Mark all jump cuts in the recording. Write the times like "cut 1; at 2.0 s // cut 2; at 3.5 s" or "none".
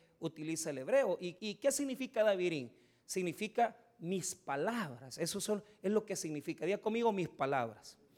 cut 1; at 1.4 s